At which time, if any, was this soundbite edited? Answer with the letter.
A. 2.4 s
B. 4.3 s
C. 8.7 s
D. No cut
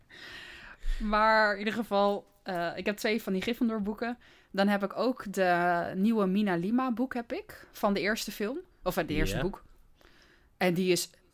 C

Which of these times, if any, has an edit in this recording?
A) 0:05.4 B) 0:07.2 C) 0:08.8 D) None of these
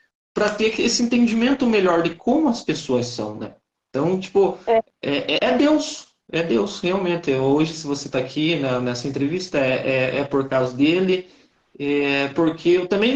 A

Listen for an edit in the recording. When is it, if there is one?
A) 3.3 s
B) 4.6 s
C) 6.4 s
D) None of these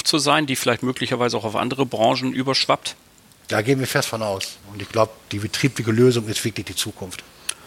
B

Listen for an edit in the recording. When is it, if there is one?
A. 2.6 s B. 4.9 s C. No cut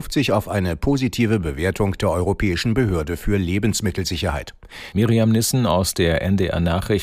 B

